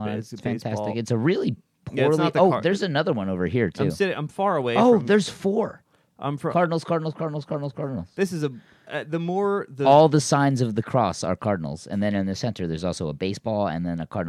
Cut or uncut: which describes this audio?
uncut